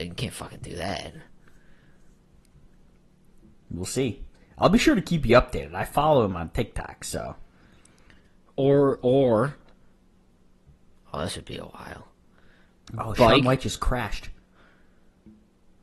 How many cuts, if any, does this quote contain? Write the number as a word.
zero